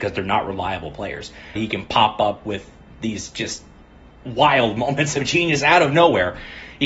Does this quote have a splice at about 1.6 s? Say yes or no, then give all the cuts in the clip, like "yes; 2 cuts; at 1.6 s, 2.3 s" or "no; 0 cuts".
yes; 1 cut; at 1.6 s